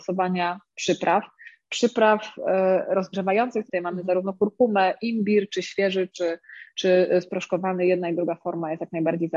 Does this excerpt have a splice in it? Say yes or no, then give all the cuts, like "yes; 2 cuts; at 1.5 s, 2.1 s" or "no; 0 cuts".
yes; 1 cut; at 3.7 s